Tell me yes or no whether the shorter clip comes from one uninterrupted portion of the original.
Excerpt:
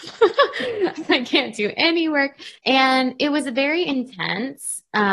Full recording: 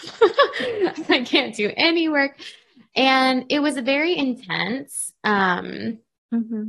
no